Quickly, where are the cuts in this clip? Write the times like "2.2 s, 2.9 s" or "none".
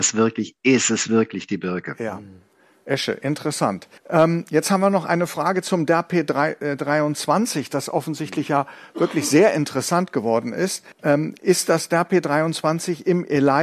4.0 s, 10.9 s